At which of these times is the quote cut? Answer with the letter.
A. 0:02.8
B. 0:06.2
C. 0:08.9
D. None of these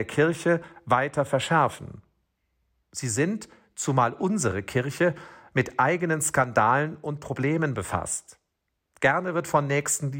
A